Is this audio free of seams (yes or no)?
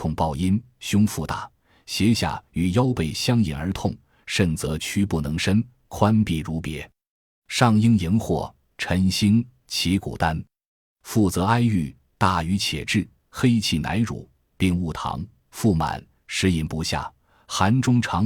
yes